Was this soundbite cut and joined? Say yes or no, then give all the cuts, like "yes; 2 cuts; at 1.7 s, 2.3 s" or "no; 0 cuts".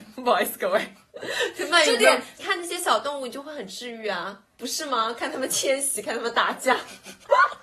yes; 1 cut; at 2.3 s